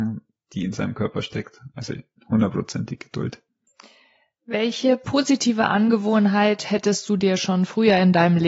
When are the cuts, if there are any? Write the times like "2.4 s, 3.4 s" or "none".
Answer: none